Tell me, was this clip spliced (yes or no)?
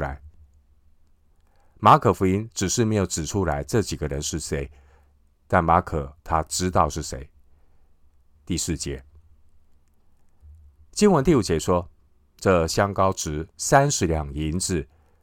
yes